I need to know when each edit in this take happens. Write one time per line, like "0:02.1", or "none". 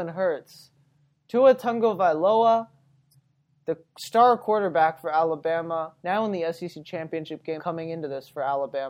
0:06.0
0:07.6